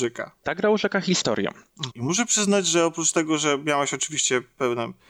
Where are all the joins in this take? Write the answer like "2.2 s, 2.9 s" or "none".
1.9 s